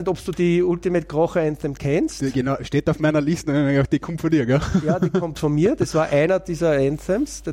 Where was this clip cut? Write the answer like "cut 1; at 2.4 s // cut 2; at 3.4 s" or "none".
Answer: none